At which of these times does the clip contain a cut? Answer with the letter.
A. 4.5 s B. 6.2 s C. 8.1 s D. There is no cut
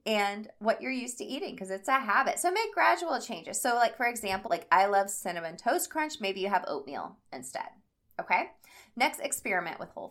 A